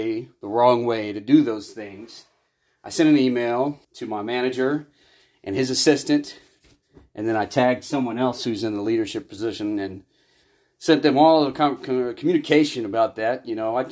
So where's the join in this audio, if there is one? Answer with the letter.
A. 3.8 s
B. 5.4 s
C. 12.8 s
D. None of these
A